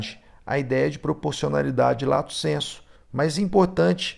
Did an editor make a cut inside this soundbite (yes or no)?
yes